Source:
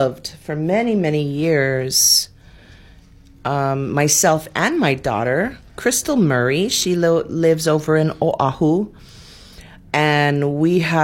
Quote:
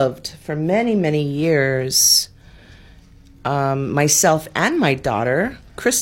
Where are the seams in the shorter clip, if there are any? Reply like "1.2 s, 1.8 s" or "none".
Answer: none